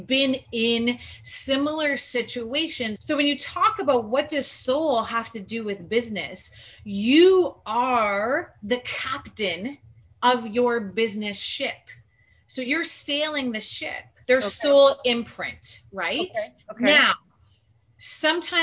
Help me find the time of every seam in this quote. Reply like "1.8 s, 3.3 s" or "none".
3.0 s, 14.2 s